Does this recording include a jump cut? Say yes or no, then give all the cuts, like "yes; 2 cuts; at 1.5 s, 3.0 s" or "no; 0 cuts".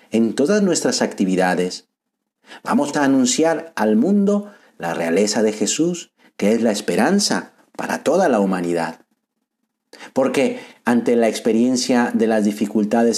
yes; 1 cut; at 2.9 s